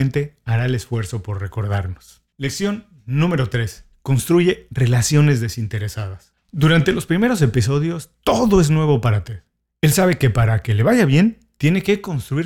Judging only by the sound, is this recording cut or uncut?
uncut